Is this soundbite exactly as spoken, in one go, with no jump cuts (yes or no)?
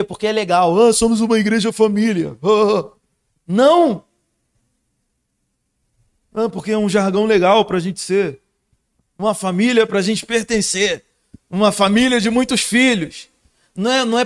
yes